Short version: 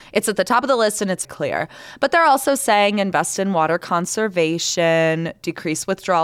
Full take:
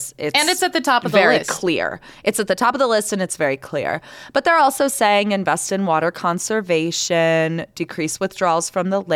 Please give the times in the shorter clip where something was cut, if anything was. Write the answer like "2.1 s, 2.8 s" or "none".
1.2 s